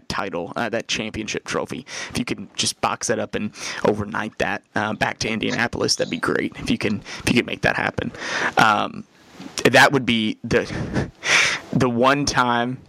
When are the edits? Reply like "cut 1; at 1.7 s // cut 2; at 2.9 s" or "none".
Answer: none